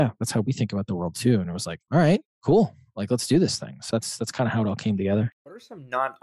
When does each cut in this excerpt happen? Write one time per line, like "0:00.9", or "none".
0:01.9
0:03.9